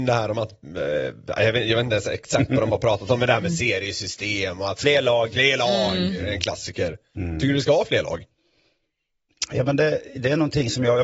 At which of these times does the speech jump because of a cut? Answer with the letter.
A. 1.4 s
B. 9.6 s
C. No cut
C